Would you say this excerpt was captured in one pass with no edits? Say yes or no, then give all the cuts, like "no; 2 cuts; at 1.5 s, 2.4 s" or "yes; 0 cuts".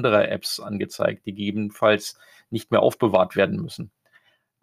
yes; 0 cuts